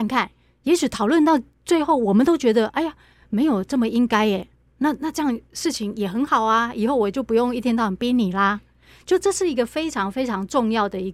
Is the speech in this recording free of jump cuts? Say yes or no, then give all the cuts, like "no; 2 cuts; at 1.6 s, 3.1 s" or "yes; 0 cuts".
yes; 0 cuts